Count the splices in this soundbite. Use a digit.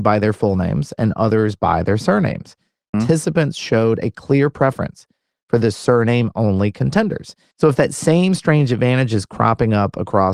2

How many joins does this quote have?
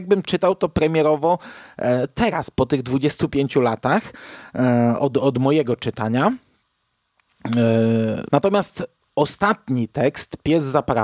1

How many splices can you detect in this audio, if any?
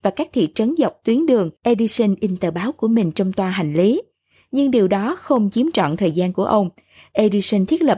1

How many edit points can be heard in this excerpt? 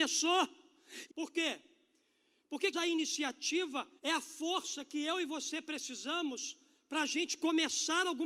3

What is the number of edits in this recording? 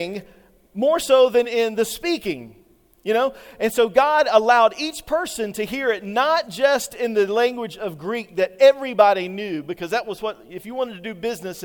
1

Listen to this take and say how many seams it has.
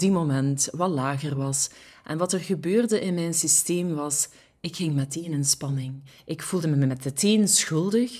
0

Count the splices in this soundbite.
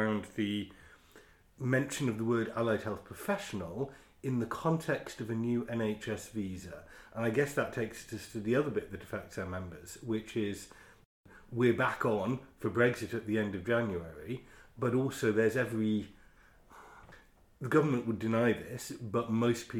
0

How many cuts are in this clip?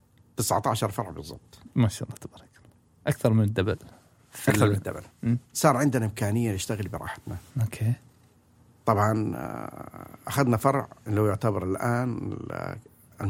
2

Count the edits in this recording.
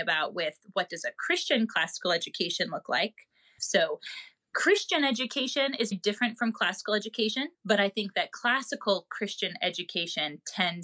3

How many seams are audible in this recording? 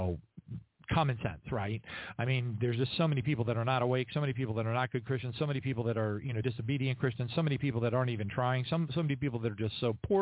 0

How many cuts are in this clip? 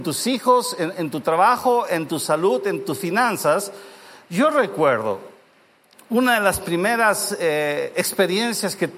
0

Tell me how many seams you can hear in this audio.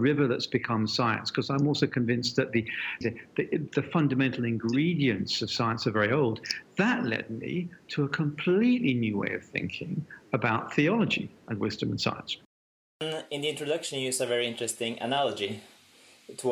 1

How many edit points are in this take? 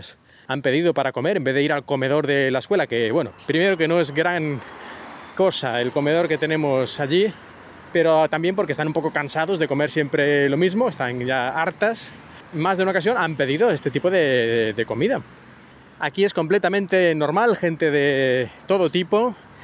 0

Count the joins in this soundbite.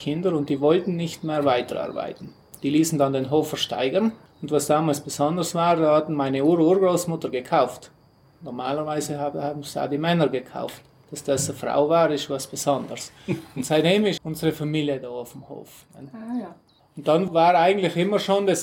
1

